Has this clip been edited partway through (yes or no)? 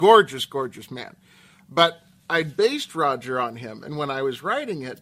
no